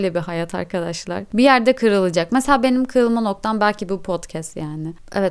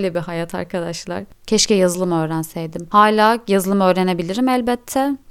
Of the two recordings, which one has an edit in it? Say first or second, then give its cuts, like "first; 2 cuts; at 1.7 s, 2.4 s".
second; 1 cut; at 1.3 s